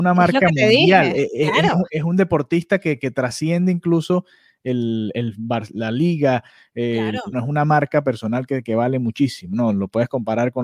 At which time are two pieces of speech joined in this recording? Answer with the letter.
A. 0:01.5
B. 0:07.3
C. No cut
B